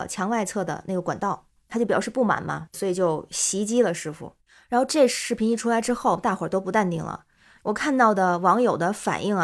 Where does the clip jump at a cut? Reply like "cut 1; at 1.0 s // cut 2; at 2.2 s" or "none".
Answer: none